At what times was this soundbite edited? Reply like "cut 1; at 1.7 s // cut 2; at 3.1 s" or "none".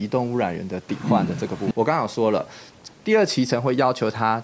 cut 1; at 1.7 s // cut 2; at 2.9 s